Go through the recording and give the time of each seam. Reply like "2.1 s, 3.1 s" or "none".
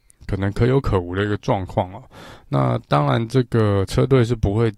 none